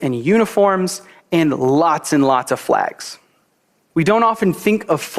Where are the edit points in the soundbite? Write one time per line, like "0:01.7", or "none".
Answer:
0:03.9